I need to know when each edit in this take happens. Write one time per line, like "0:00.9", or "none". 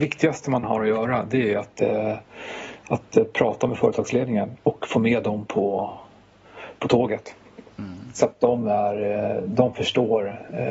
0:07.7